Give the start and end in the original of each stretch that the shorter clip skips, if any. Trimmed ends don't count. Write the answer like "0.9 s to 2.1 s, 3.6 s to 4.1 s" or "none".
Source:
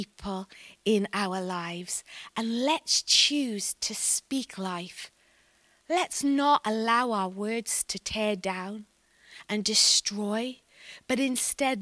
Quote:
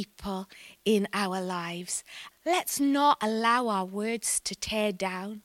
2.3 s to 5.7 s